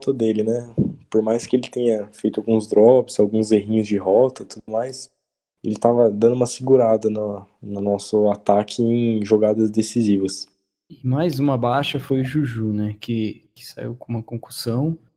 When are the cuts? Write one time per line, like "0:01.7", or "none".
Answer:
none